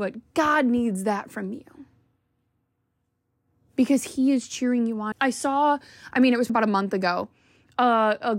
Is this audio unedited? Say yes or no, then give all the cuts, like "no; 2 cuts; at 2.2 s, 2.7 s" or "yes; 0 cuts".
no; 2 cuts; at 5.1 s, 6.5 s